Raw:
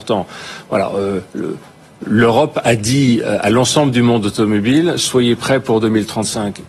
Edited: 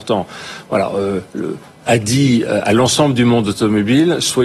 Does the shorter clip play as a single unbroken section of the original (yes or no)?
no